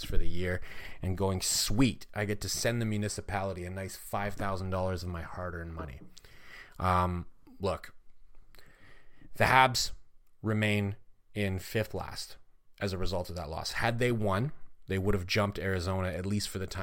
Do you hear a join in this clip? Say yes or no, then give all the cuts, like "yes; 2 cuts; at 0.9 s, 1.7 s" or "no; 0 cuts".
no; 0 cuts